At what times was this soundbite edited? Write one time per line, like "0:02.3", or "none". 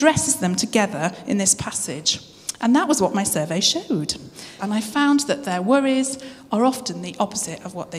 0:04.6